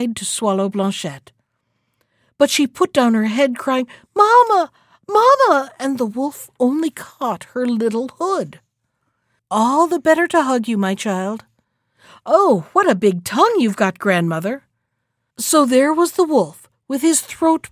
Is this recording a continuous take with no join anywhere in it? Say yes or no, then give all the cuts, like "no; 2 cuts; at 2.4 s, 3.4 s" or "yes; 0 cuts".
no; 2 cuts; at 9.4 s, 15.3 s